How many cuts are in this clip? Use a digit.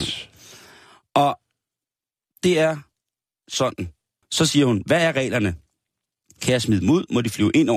1